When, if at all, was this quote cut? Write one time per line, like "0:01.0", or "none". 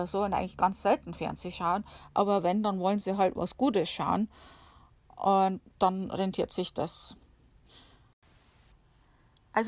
0:05.7